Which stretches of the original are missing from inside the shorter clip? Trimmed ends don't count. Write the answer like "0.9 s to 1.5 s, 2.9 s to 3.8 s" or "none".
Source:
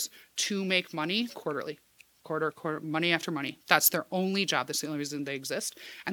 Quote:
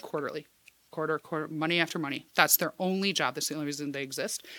none